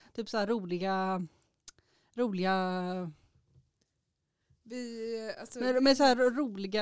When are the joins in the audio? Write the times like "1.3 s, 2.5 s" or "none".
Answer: none